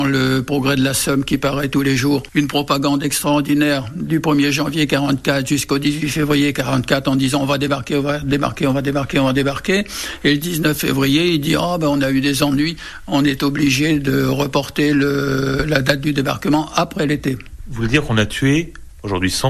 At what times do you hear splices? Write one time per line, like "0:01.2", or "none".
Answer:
none